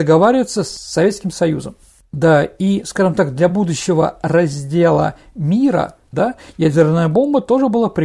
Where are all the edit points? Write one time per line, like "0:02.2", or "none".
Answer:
0:06.1